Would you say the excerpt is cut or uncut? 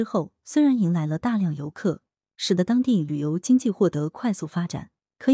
uncut